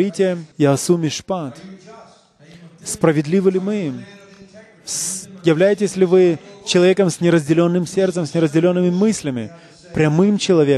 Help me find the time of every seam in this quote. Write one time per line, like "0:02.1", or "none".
none